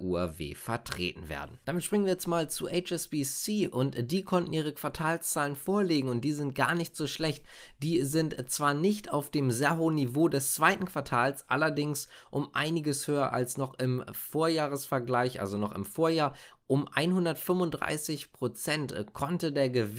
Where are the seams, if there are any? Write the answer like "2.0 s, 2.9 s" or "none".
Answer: none